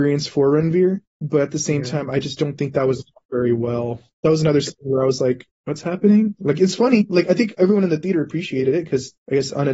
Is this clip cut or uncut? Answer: uncut